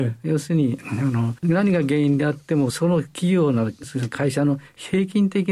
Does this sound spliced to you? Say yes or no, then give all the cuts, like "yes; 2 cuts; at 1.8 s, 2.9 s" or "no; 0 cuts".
yes; 1 cut; at 1.4 s